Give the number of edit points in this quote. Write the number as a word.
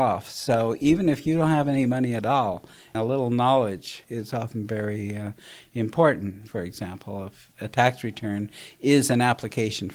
one